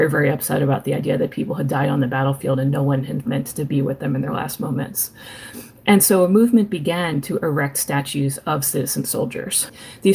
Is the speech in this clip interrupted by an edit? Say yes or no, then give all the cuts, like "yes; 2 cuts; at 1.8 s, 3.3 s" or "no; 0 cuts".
yes; 1 cut; at 3.2 s